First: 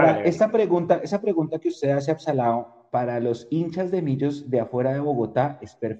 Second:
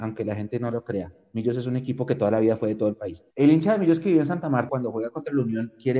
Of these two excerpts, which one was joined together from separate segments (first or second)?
second